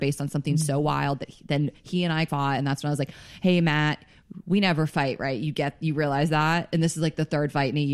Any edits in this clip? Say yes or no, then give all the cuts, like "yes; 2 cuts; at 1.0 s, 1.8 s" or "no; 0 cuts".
no; 0 cuts